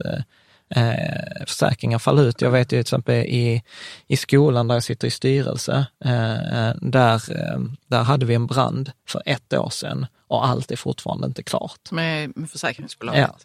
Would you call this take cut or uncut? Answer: uncut